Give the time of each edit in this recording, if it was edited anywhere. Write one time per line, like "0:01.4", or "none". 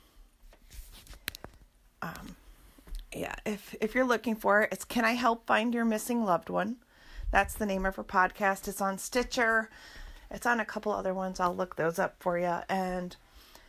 none